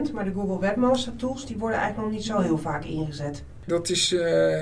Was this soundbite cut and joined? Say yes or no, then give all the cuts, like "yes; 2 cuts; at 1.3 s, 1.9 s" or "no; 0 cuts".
yes; 1 cut; at 3.7 s